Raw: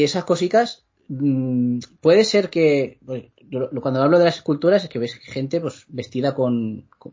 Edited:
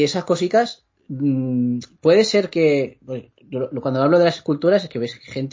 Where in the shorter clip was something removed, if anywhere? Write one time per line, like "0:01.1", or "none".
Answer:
none